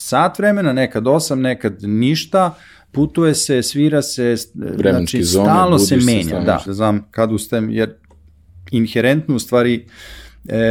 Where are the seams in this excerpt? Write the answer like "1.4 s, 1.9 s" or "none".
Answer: 6.7 s